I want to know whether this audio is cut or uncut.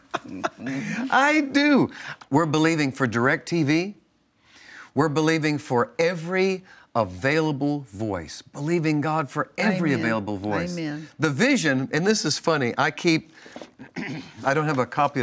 cut